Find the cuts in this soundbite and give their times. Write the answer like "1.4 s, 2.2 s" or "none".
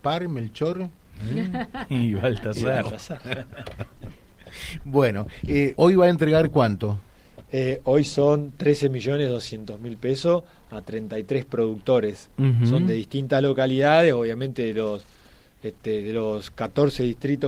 5.7 s